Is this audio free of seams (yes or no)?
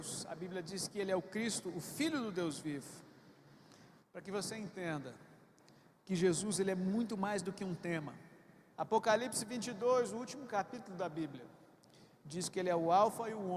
no